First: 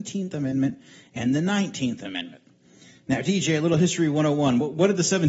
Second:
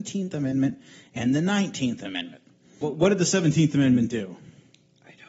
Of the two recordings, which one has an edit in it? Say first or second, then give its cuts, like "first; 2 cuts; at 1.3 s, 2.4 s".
second; 1 cut; at 2.8 s